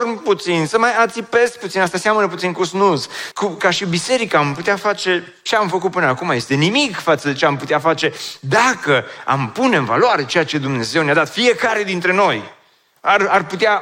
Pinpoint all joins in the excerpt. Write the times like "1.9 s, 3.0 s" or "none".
3.3 s